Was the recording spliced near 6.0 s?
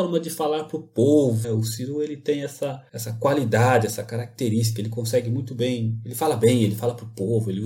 no; 1 cut; at 1.4 s

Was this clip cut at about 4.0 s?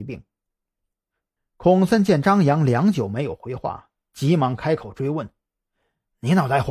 no; 1 cut; at 1.4 s

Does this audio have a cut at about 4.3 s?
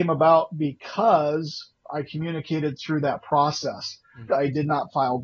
yes; 1 cut; at 4.3 s

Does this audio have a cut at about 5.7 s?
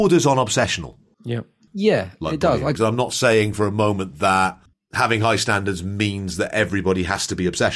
no; 2 cuts; at 1.7 s, 2.8 s

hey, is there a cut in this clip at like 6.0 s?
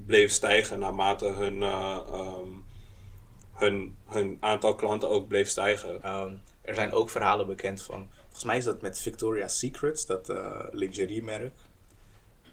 yes; 2 cuts; at 3.4 s, 6.0 s

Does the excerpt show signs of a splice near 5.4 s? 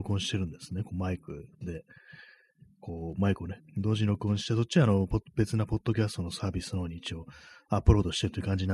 no; 1 cut; at 3.6 s

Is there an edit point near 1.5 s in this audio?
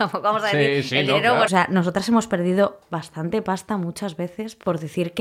yes; 1 cut; at 1.5 s

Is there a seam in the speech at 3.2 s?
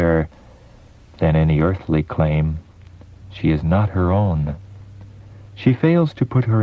yes; 1 cut; at 3.2 s

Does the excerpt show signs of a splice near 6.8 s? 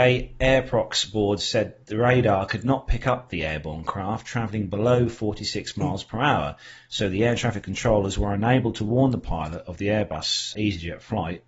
no; 1 cut; at 10.5 s

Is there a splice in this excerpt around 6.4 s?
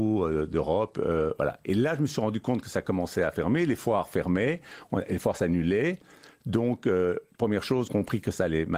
no; 1 cut; at 7.9 s

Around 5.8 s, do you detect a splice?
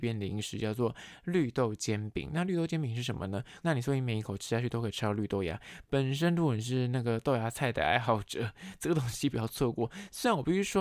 no; 2 cuts; at 2.3 s, 3.6 s

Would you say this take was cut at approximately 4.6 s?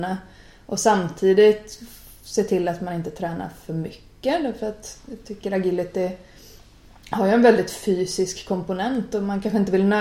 no; 0 cuts

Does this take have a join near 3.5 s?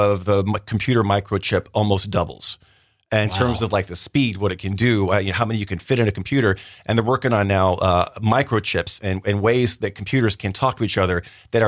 no; 1 cut; at 8.1 s

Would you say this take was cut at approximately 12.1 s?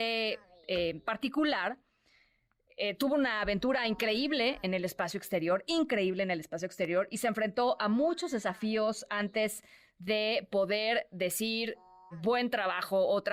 yes; 1 cut; at 12.1 s

